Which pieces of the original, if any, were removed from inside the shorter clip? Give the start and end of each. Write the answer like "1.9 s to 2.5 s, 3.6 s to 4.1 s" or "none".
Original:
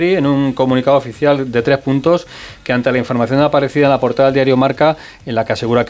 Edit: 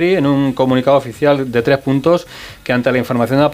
none